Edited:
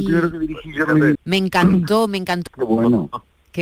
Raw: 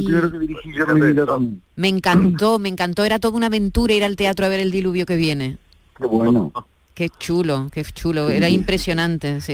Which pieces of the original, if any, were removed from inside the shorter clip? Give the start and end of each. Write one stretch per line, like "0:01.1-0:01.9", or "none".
0:01.1-0:01.7
0:03.0-0:05.9

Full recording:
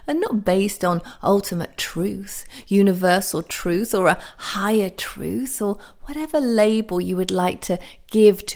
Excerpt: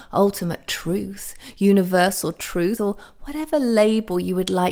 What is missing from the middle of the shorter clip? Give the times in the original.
0:03.9-0:05.6

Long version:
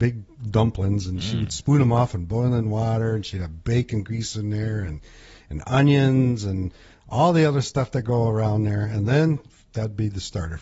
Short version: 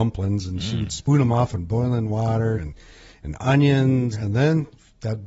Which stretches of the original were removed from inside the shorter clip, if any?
0:03.2-0:04.8
0:06.4-0:08.8

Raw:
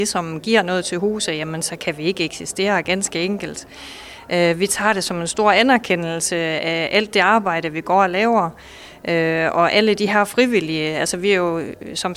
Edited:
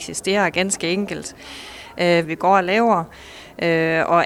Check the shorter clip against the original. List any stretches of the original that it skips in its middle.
0:04.6-0:07.7

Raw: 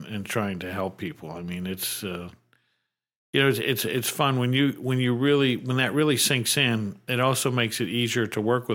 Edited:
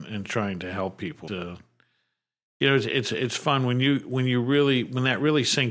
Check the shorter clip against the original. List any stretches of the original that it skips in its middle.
0:01.3-0:02.0

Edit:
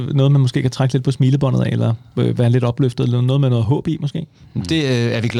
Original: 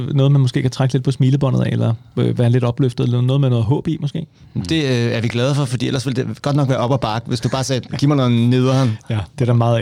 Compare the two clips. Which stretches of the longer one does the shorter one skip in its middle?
none

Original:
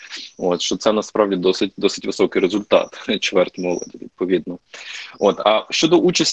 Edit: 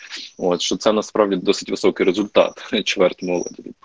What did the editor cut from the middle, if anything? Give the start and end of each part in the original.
0:01.4-0:01.7

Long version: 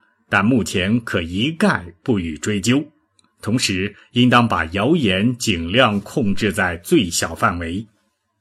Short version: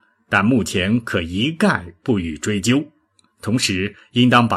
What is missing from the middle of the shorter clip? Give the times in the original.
none

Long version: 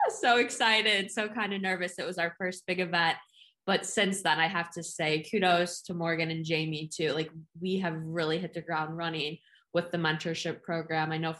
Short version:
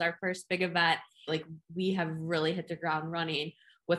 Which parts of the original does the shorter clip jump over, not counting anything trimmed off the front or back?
0:03.5-0:07.1

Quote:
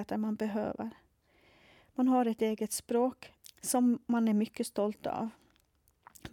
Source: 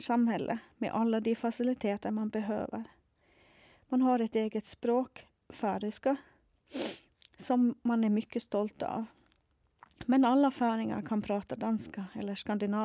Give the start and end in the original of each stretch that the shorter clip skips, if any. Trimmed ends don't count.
0:05.4-0:07.2

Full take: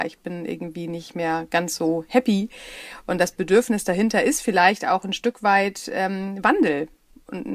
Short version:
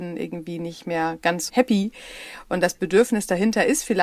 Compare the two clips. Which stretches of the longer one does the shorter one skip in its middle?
0:01.8-0:02.1

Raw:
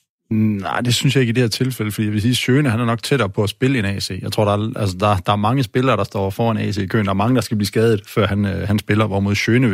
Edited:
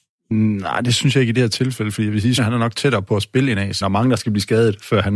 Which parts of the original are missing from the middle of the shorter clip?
0:02.4-0:02.6
0:04.1-0:07.1

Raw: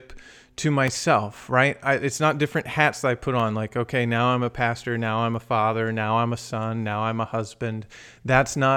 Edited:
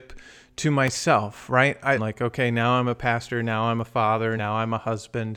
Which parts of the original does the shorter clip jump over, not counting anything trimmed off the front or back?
0:02.0-0:03.5
0:05.9-0:06.8

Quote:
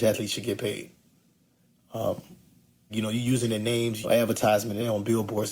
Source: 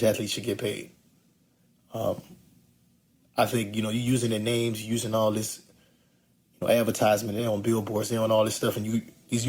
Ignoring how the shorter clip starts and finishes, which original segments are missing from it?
0:02.9-0:03.7
0:04.8-0:06.6

